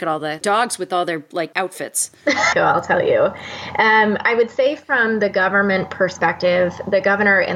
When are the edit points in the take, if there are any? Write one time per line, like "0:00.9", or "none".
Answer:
0:02.5